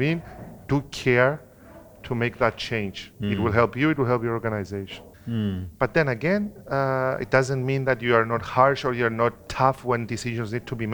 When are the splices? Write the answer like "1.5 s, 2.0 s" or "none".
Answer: 5.1 s